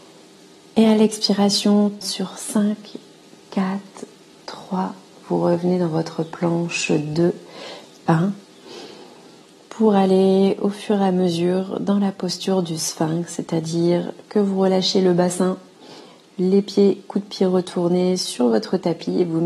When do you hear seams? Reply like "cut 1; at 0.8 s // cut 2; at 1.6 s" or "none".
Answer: cut 1; at 2.0 s